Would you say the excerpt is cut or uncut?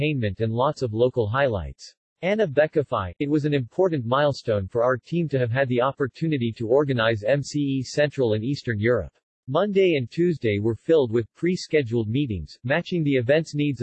cut